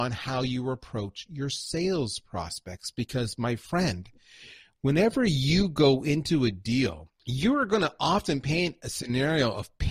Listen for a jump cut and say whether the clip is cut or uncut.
uncut